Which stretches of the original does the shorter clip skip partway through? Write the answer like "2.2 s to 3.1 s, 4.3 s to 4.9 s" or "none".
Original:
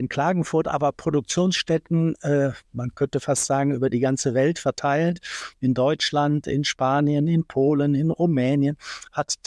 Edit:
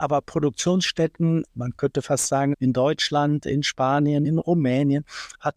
2.2 s to 2.6 s, 3.7 s to 5.5 s, 7.3 s to 8.0 s